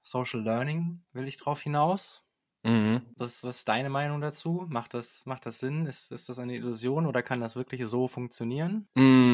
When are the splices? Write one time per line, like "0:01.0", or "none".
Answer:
0:03.2